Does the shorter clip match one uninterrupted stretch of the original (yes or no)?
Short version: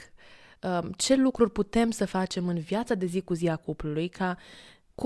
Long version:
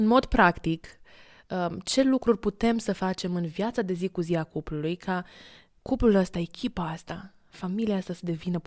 yes